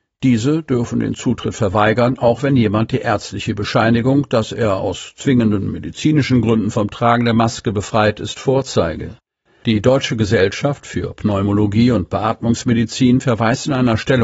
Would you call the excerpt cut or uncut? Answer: cut